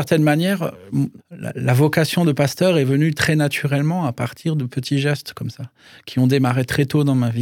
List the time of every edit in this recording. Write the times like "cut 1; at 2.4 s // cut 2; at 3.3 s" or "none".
cut 1; at 1.2 s